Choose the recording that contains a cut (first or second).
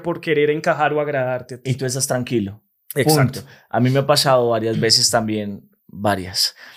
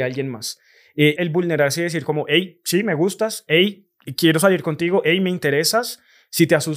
second